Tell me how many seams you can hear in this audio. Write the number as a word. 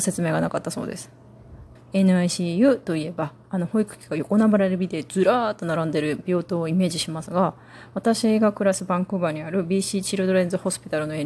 one